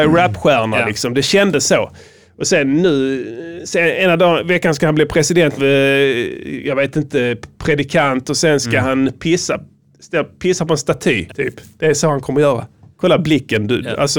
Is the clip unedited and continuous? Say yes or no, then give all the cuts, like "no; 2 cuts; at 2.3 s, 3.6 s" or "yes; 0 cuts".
no; 3 cuts; at 5.6 s, 11.3 s, 12.9 s